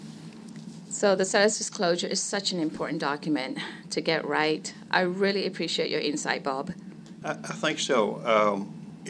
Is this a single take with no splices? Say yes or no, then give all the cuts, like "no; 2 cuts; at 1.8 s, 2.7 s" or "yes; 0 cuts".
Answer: no; 2 cuts; at 4.9 s, 7.2 s